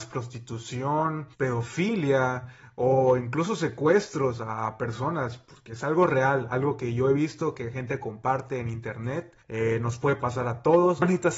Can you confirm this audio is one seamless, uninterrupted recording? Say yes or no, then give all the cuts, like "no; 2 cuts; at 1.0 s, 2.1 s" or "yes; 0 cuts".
yes; 0 cuts